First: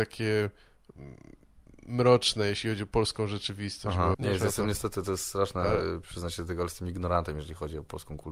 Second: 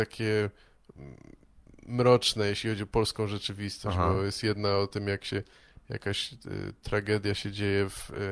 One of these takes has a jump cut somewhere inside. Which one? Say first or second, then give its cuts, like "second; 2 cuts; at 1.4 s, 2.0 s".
first; 1 cut; at 4.1 s